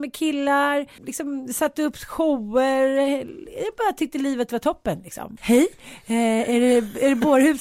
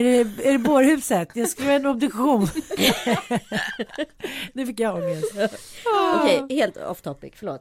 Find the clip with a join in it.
first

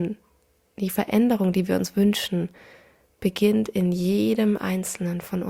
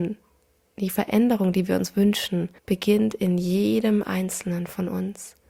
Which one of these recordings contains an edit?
second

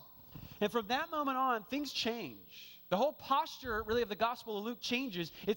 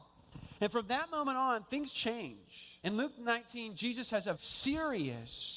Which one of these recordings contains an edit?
second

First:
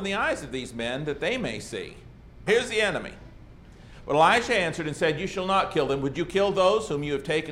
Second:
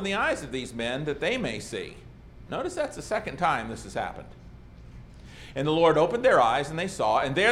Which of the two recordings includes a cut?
first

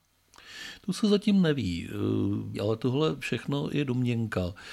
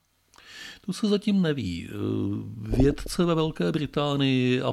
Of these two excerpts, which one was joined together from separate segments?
first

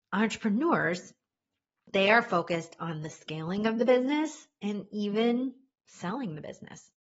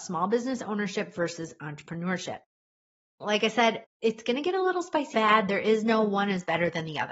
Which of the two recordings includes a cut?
second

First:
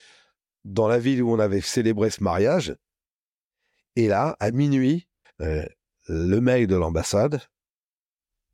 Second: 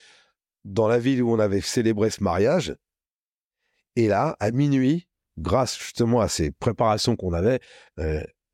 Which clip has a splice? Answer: first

